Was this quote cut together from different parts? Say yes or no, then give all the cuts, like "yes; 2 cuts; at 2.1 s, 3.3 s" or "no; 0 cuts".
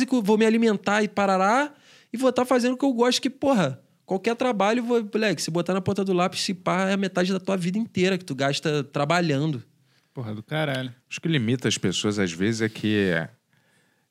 no; 0 cuts